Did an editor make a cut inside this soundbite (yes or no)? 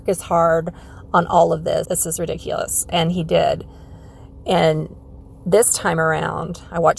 yes